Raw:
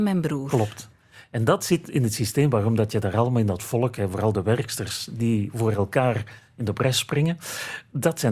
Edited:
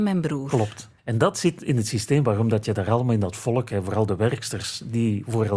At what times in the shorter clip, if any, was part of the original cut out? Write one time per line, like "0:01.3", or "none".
0:01.0